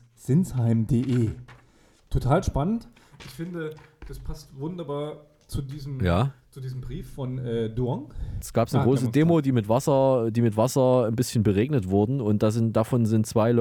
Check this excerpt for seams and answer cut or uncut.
cut